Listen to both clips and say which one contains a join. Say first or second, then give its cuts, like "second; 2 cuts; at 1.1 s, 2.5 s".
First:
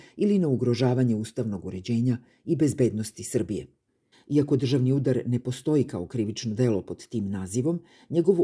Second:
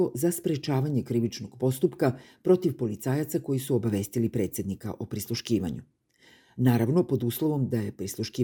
first; 1 cut; at 4.1 s